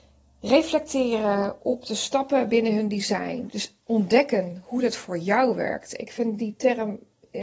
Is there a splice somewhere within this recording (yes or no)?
yes